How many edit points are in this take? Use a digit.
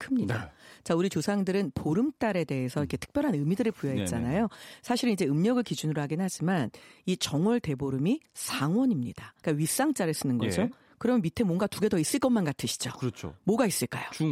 1